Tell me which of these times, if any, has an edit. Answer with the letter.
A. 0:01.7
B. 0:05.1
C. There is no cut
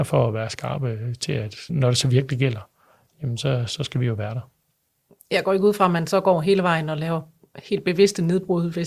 A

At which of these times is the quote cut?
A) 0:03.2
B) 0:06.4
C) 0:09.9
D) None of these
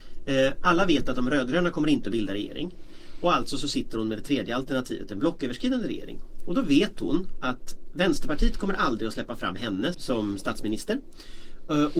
C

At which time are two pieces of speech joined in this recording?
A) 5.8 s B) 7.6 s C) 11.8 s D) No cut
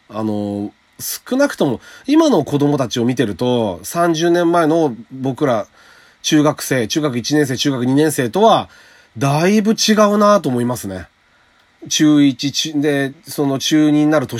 C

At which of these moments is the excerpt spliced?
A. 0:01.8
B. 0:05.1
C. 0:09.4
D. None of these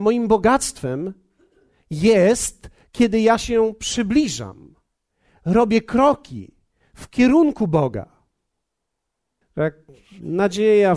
C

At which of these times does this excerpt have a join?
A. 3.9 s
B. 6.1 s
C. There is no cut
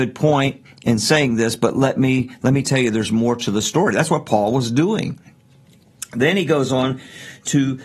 C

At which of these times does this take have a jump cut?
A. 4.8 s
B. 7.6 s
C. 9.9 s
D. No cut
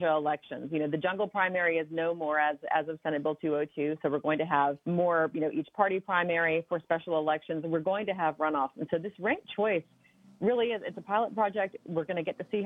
A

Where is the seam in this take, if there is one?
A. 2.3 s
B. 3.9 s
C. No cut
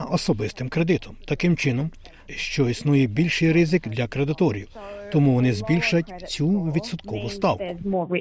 A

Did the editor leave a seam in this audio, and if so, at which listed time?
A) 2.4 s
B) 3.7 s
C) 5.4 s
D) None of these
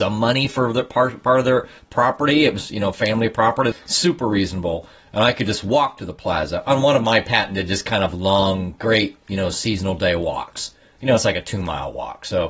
B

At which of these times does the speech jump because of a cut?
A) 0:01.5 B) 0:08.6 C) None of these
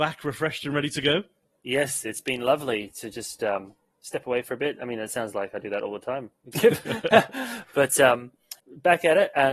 B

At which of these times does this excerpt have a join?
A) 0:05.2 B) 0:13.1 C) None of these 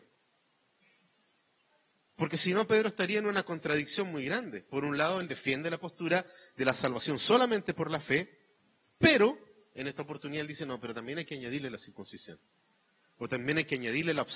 A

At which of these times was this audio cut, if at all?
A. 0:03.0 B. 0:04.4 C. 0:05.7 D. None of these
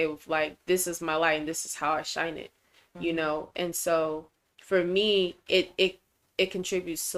B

